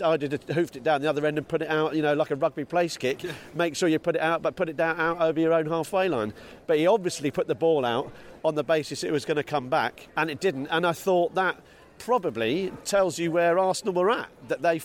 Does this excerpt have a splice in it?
yes; 1 cut; at 10.1 s

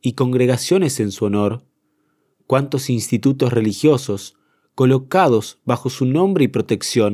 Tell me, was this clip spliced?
no; 0 cuts

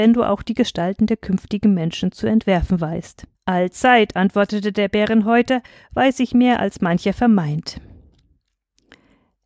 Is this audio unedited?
no; 1 cut; at 3.3 s

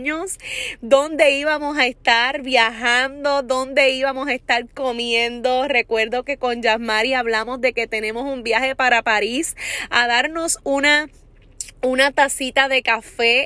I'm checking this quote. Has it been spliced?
no; 0 cuts

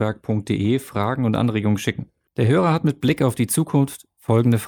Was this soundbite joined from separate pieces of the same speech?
no; 0 cuts

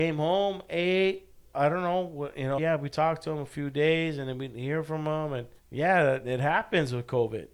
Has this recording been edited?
yes; 2 cuts; at 2.6 s, 5.6 s

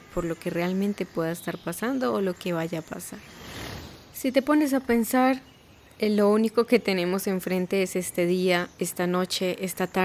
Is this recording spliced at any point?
no; 0 cuts

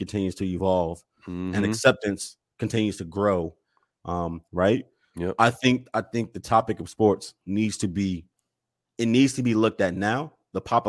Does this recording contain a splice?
yes; 1 cut; at 4.5 s

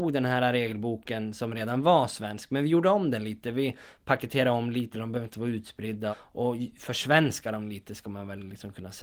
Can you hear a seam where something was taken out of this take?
yes; 2 cuts; at 4.9 s, 6.1 s

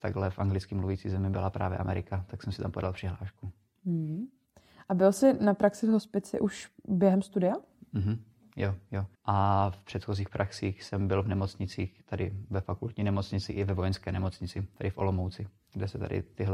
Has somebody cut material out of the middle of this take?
yes; 1 cut; at 9.1 s

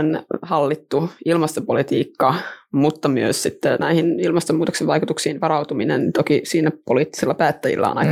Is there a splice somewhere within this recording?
no; 0 cuts

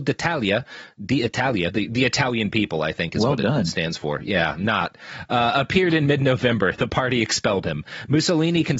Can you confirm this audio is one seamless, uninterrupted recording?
yes; 0 cuts

